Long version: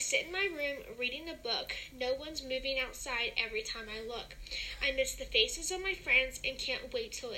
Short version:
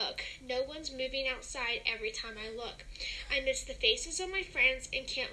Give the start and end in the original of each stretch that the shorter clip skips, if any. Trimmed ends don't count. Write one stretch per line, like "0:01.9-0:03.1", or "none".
none